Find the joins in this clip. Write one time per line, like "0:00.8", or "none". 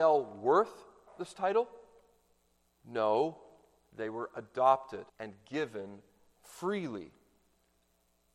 0:02.6
0:05.1